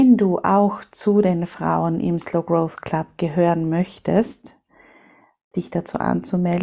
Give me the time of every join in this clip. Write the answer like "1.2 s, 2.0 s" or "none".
5.5 s